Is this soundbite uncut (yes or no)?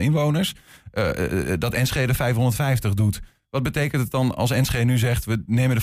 yes